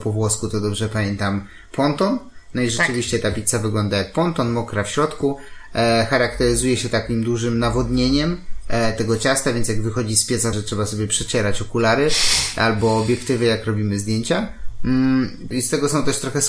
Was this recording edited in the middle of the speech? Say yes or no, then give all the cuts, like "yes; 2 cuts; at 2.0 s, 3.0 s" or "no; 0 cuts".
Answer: yes; 2 cuts; at 10.5 s, 15.5 s